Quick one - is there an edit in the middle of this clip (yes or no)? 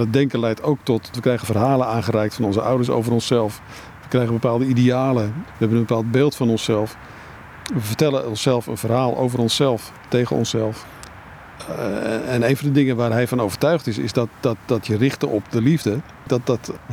yes